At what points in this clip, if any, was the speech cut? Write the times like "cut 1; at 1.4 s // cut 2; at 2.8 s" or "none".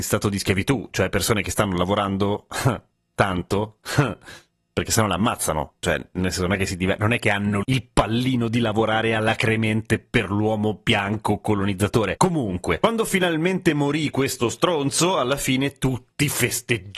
cut 1; at 12.2 s